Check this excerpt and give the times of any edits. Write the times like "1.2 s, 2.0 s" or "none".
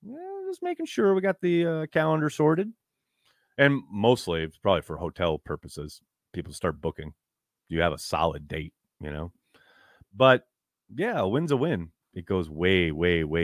10.0 s, 12.0 s